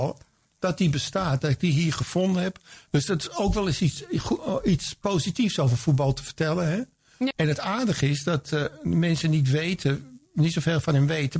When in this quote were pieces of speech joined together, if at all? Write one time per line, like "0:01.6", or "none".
0:02.9
0:07.3

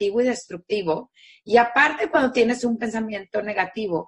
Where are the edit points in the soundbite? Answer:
none

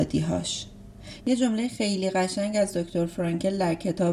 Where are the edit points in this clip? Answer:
0:01.2

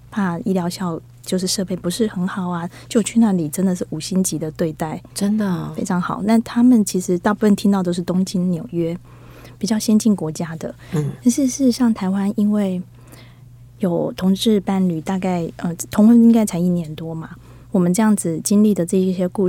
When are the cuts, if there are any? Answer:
none

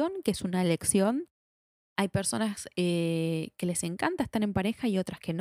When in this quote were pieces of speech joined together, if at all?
none

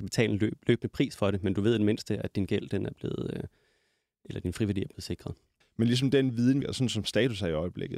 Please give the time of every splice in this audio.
0:05.6
0:06.6

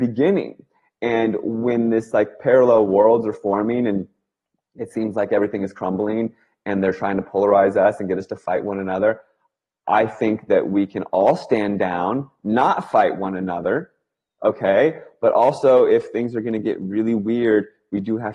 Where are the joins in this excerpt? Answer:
none

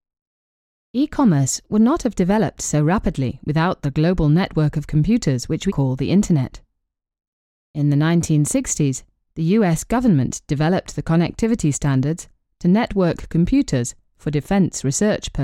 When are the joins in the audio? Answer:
0:05.7

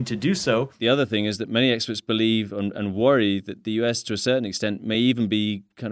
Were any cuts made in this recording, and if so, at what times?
none

